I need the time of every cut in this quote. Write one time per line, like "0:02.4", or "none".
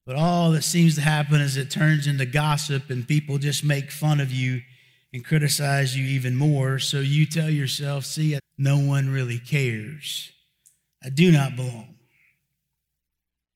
0:08.4
0:10.9